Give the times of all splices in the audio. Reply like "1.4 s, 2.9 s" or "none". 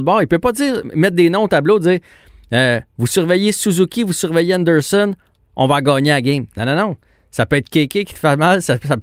none